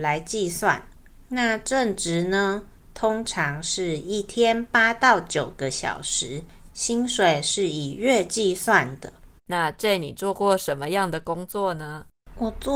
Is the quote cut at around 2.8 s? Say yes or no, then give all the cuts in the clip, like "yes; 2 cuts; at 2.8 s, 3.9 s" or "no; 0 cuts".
no; 2 cuts; at 6.7 s, 9.4 s